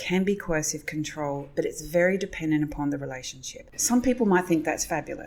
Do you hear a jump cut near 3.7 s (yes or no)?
yes